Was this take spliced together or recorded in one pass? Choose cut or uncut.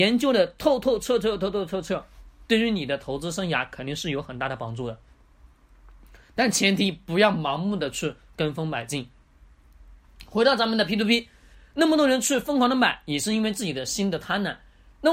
uncut